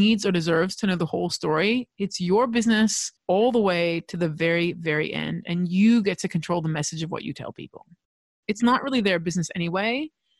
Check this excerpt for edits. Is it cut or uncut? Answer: cut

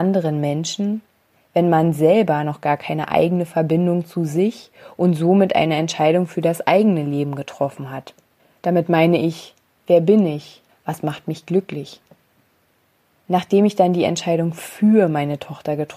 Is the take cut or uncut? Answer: cut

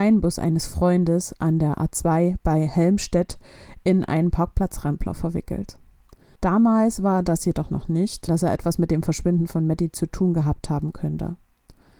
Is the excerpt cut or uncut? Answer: cut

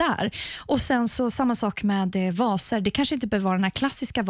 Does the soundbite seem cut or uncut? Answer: uncut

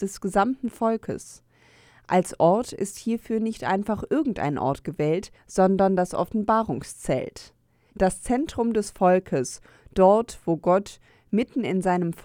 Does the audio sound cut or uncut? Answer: uncut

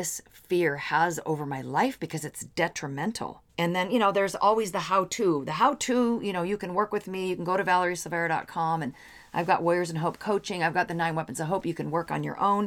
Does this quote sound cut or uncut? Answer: cut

